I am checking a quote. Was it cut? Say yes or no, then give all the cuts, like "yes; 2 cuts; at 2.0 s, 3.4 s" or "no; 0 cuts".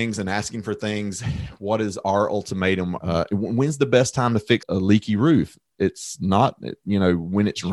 yes; 2 cuts; at 3.0 s, 4.6 s